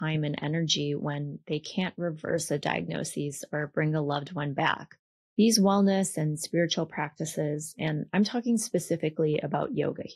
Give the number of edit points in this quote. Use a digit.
1